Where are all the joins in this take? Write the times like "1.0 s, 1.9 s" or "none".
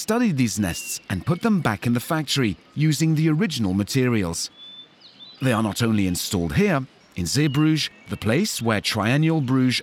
5.4 s, 7.0 s